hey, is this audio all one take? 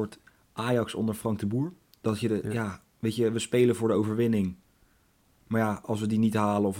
yes; 0 cuts

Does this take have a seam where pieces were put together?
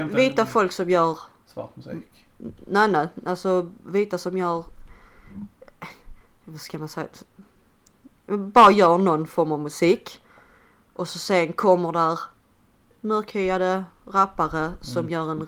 no; 0 cuts

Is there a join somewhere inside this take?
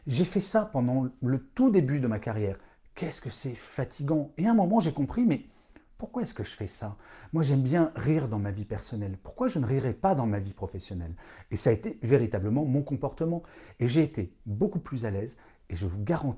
no; 0 cuts

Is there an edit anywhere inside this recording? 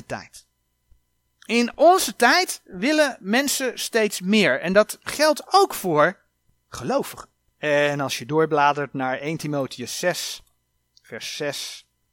yes; 1 cut; at 7.5 s

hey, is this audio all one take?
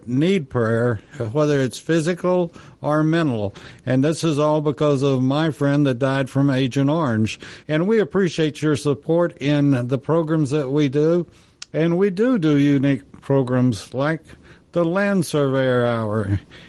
no; 1 cut; at 7.6 s

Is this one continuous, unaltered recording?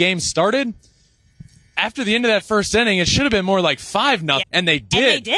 no; 1 cut; at 4.4 s

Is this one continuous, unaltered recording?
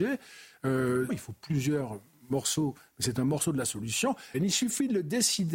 no; 2 cuts; at 1.1 s, 4.3 s

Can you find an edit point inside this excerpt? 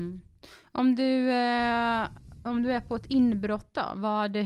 no; 0 cuts

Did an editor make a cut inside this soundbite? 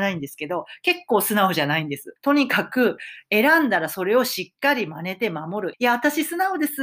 yes; 2 cuts; at 2.2 s, 5.7 s

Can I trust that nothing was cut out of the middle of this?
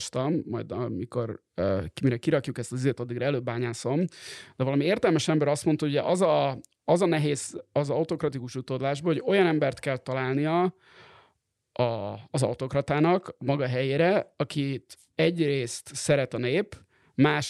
yes; 0 cuts

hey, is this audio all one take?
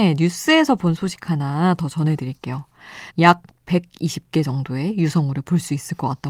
no; 1 cut; at 3.1 s

